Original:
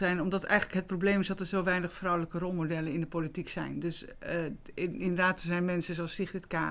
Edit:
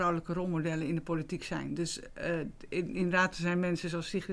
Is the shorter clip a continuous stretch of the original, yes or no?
yes